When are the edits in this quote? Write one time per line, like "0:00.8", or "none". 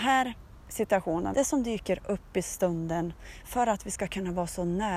0:01.3

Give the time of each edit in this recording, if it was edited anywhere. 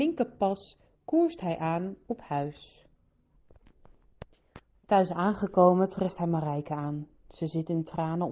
0:04.7

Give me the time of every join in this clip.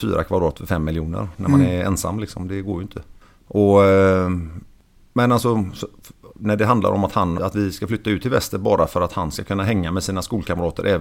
0:07.4

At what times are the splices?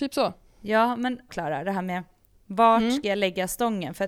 0:01.3

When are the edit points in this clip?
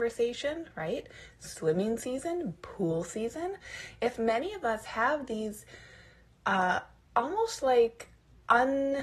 0:02.6

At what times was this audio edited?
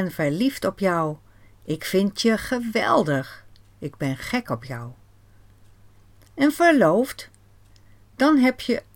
none

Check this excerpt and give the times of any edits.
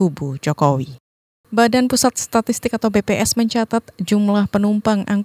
0:01.4

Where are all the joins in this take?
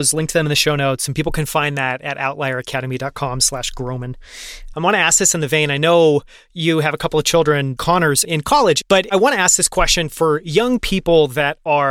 0:04.7
0:07.8
0:08.8

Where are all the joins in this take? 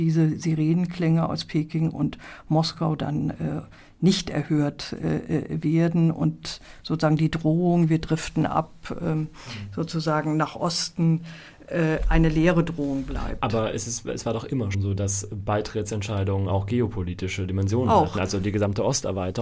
0:14.7

